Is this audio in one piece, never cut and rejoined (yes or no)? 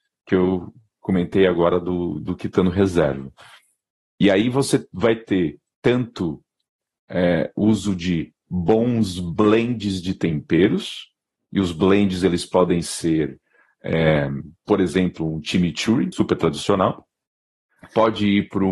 no